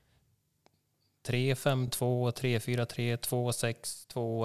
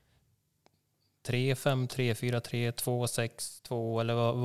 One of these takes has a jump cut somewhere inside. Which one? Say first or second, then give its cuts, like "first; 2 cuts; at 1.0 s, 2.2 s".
second; 1 cut; at 1.9 s